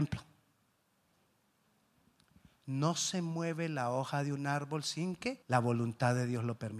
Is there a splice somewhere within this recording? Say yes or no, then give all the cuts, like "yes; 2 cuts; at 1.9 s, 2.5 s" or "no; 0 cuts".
yes; 1 cut; at 5.4 s